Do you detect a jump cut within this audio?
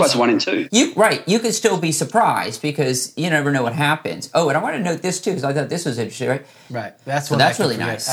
yes; 1 cut; at 6.7 s

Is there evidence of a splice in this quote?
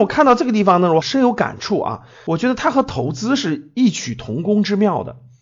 no; 0 cuts

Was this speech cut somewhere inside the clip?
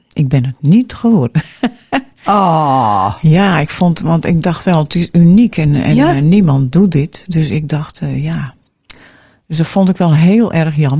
no; 0 cuts

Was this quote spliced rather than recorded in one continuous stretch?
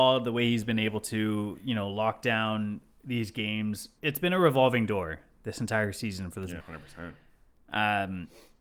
yes; 2 cuts; at 4.0 s, 6.6 s

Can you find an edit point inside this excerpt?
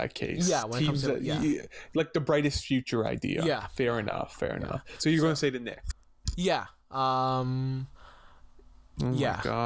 no; 0 cuts

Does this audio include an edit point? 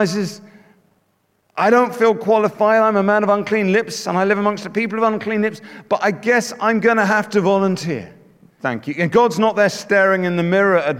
yes; 1 cut; at 8.6 s

